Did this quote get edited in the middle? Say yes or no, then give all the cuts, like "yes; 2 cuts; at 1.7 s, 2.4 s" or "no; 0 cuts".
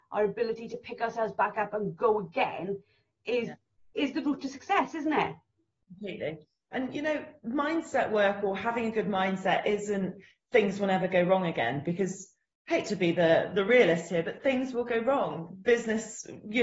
no; 0 cuts